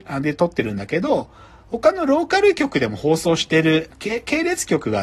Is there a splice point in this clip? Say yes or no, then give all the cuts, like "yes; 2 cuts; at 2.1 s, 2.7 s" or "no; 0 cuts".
yes; 1 cut; at 3.9 s